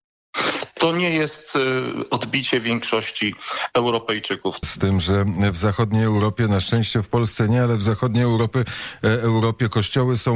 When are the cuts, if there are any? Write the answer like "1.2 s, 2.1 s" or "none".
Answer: 4.6 s